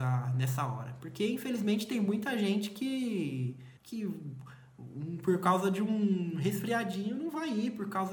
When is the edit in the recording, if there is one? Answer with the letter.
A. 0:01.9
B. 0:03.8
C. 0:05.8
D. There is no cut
B